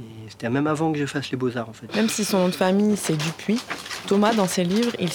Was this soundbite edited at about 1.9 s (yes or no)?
yes